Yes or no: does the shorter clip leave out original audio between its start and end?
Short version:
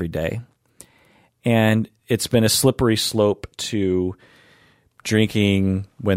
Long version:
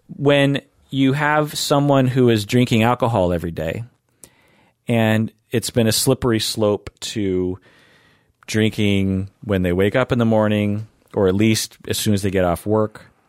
no